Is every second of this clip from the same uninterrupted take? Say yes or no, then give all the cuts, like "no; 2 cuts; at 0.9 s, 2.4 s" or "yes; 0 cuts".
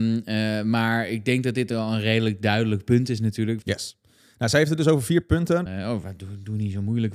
no; 2 cuts; at 3.6 s, 5.7 s